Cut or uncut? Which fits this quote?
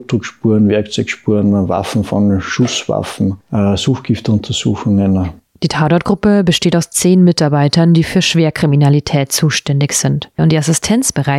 cut